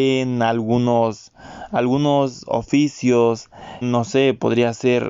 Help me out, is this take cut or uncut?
cut